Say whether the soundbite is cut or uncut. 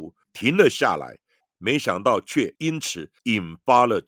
uncut